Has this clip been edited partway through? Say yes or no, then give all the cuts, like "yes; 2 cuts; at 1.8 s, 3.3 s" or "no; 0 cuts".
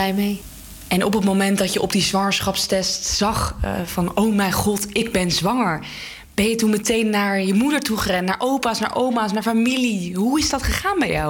no; 0 cuts